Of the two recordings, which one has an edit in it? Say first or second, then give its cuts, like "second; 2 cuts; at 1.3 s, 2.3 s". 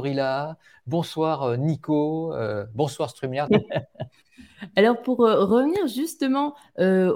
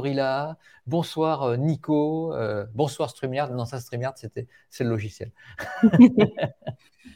first; 1 cut; at 3.5 s